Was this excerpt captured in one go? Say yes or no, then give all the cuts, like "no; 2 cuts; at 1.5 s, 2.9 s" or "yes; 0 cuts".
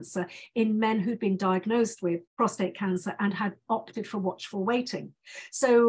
no; 1 cut; at 2.3 s